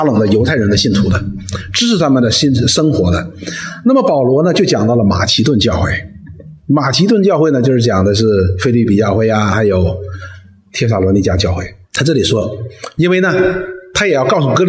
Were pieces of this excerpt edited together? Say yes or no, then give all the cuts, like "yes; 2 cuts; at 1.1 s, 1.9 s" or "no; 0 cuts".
yes; 2 cuts; at 11.8 s, 13.0 s